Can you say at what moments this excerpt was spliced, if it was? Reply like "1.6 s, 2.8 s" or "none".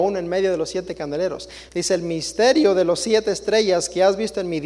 1.7 s